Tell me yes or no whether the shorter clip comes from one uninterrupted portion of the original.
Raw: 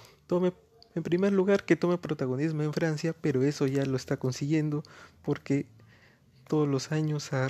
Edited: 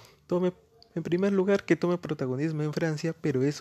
yes